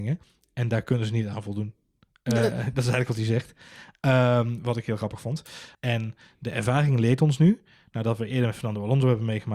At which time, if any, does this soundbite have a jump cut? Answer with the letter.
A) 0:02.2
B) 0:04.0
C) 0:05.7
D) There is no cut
C